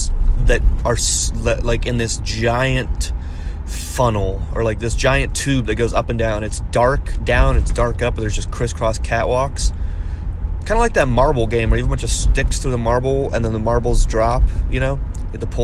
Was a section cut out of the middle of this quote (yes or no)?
no